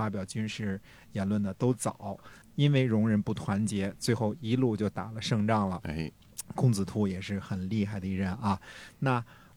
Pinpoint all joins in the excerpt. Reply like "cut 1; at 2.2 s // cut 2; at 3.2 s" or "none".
cut 1; at 2.4 s